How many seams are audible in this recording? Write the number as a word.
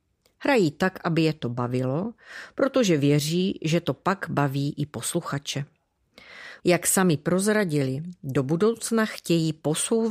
one